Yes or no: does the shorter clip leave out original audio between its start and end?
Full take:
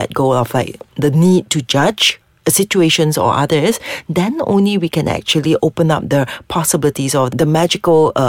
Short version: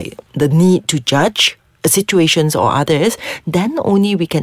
no